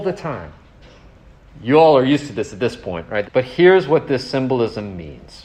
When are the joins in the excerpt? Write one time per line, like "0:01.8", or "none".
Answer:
0:01.5
0:03.2